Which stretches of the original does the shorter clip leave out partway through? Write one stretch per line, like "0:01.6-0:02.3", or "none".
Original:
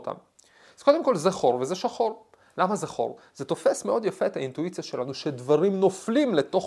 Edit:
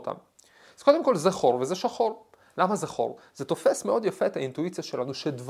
none